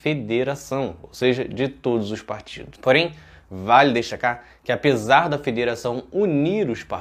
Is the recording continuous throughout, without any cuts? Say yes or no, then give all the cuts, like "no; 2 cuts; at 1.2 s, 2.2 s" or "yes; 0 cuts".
yes; 0 cuts